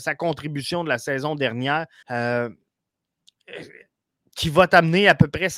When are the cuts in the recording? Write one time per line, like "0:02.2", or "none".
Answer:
0:02.0

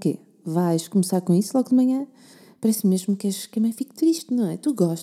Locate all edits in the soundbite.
none

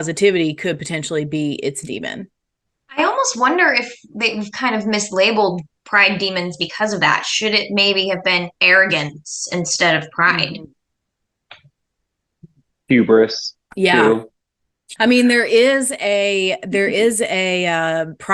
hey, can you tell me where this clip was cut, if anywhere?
0:15.0

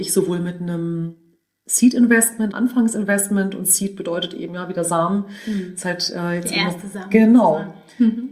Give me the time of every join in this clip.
0:02.5

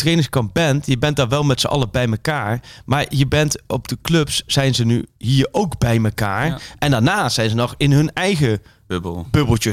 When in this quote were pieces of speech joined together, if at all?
none

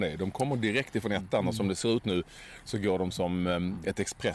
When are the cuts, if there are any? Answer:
none

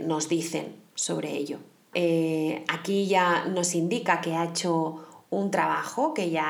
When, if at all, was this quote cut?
0:01.9

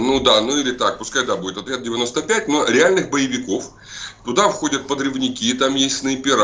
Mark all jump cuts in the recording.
none

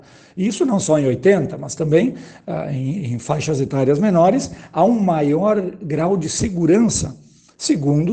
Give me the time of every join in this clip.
none

